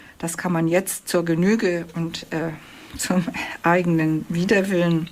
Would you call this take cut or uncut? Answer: uncut